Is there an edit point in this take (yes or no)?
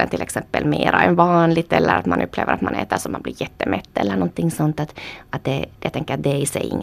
no